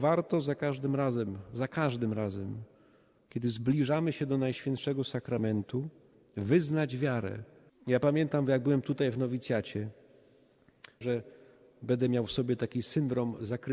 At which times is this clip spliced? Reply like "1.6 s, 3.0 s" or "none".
7.7 s, 11.0 s